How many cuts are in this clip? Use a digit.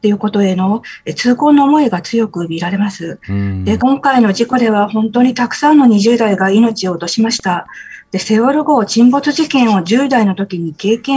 1